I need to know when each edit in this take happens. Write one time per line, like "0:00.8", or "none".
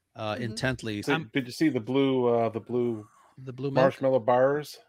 0:01.0